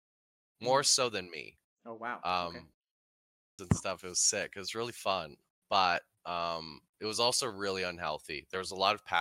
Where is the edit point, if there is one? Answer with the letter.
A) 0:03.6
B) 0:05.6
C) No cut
A